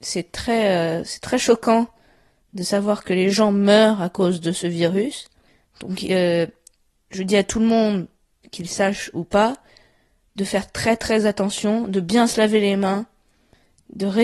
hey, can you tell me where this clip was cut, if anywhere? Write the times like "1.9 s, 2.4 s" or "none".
none